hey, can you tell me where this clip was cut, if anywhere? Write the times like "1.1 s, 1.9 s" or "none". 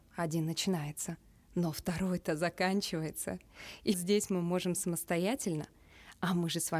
3.9 s

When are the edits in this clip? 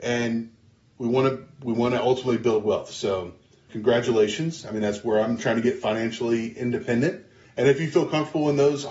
3.7 s, 7.4 s

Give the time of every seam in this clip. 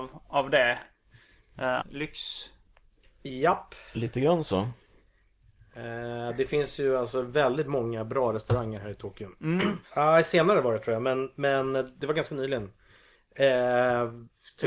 1.8 s, 9.8 s

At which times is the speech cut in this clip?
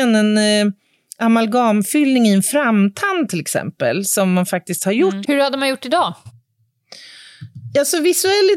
5.2 s

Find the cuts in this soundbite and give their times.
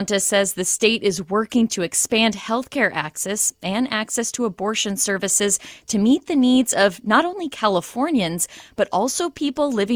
none

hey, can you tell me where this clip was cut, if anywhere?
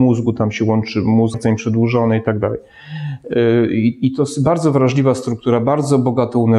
1.3 s

